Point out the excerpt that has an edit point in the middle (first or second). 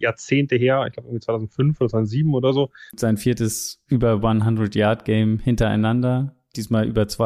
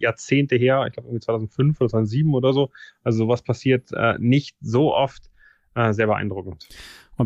first